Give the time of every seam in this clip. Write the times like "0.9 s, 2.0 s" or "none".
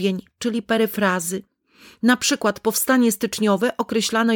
none